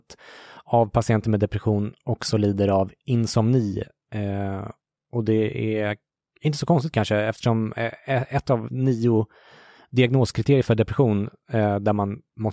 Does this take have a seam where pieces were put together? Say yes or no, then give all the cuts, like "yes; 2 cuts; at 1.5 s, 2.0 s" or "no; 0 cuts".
no; 0 cuts